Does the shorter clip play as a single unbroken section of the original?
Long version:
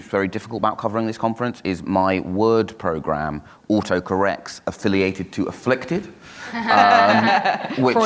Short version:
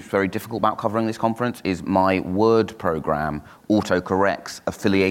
yes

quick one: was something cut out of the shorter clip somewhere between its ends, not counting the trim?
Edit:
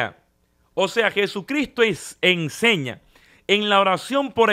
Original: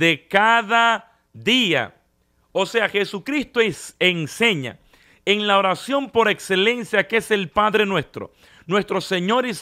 no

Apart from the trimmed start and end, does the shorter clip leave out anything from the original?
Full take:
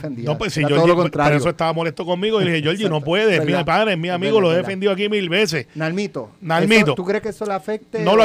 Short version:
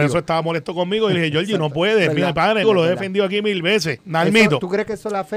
yes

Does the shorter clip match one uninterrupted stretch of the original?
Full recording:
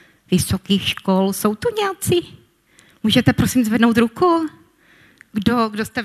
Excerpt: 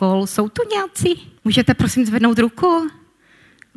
no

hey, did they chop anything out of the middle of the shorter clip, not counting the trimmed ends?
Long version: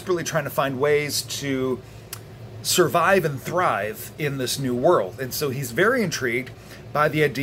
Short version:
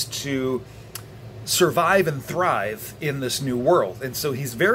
no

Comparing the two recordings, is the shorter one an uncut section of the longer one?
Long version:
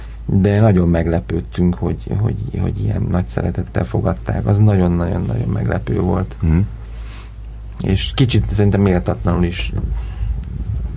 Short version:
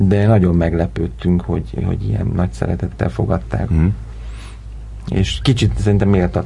no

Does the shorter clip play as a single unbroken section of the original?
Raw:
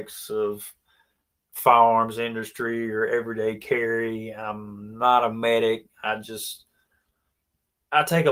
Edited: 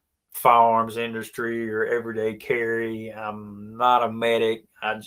yes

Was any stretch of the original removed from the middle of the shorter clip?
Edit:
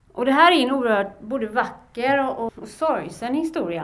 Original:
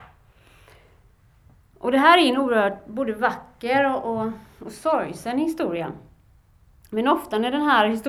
yes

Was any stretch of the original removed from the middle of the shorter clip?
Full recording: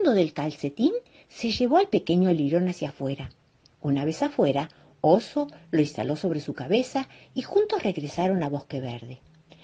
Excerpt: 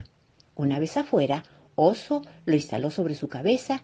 no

